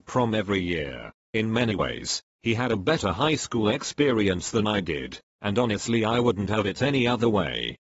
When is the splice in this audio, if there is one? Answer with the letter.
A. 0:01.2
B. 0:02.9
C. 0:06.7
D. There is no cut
A